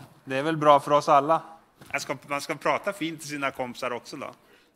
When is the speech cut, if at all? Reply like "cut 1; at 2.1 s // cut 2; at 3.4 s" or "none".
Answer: none